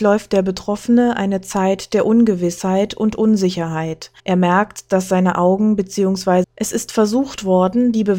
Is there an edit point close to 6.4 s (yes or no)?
yes